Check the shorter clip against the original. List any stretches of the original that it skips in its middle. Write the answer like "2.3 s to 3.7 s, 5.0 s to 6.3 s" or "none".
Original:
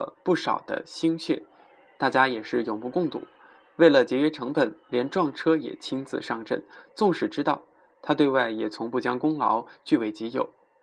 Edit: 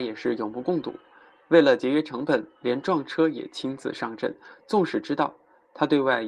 none